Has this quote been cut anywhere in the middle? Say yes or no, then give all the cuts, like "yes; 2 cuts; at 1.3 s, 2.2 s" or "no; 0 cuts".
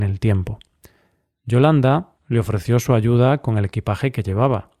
yes; 1 cut; at 2.2 s